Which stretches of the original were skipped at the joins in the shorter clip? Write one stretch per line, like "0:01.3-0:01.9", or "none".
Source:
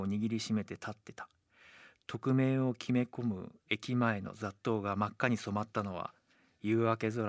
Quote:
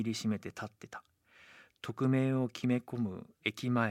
none